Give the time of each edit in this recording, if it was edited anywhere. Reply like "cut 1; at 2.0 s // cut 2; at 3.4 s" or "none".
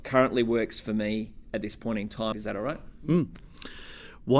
cut 1; at 2.3 s